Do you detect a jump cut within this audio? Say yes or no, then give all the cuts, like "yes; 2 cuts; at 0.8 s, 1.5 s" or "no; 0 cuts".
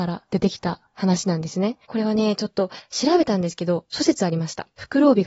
yes; 1 cut; at 1.9 s